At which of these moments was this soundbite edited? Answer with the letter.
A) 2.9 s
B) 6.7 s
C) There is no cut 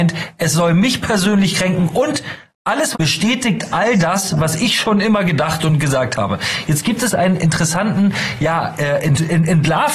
A